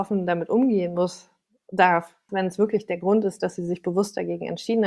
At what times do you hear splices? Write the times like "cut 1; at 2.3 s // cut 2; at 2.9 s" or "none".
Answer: cut 1; at 2.3 s